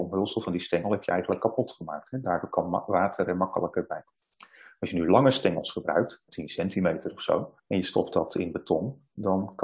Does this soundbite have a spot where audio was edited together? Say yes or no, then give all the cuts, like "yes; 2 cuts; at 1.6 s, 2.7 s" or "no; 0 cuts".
yes; 2 cuts; at 6.3 s, 7.6 s